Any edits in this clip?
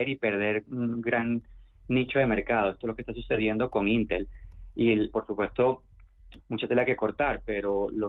yes; 2 cuts; at 5.1 s, 6.4 s

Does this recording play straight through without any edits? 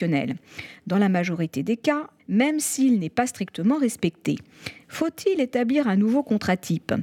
no; 2 cuts; at 2.2 s, 4.8 s

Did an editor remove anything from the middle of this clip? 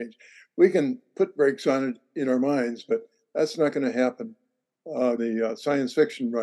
yes; 1 cut; at 5.2 s

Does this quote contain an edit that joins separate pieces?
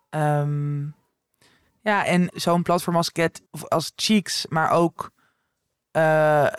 yes; 2 cuts; at 2.3 s, 3.5 s

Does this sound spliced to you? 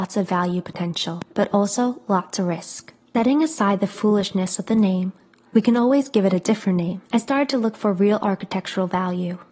yes; 1 cut; at 7.1 s

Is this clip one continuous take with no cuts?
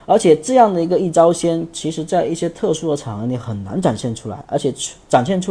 yes; 0 cuts

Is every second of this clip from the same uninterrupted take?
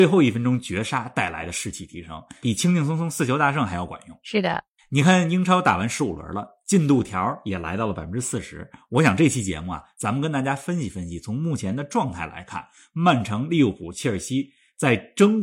yes; 0 cuts

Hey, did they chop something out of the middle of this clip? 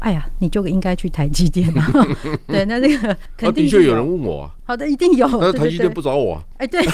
no; 0 cuts

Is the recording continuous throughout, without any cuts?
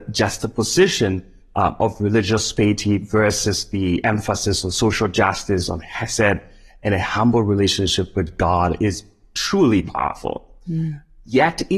yes; 0 cuts

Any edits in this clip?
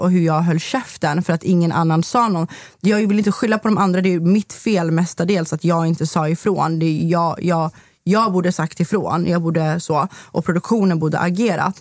no; 0 cuts

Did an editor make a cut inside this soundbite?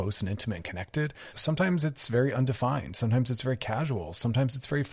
yes; 1 cut; at 1.3 s

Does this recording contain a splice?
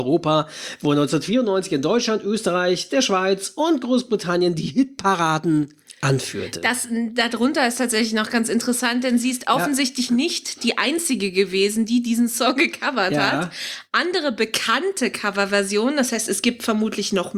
no; 0 cuts

